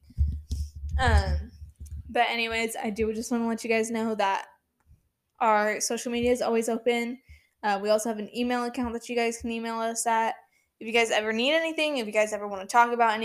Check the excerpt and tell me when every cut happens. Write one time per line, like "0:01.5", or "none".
none